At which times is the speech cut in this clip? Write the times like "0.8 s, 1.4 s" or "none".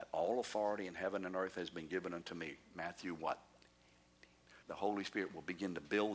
4.6 s